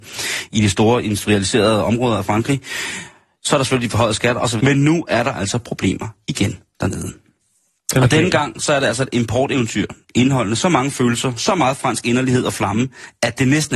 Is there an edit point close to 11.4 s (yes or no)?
no